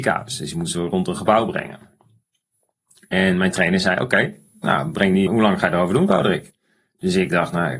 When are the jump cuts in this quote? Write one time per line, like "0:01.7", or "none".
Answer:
0:05.3